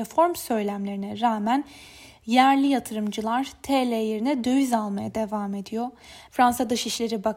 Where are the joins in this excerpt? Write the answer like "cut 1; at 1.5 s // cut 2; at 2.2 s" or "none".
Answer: cut 1; at 6.3 s